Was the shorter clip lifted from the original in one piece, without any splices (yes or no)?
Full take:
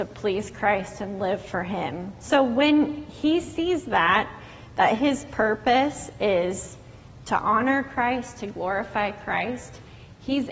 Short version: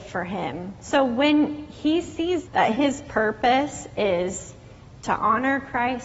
no